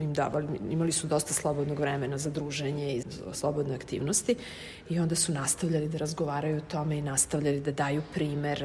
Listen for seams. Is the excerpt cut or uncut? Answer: cut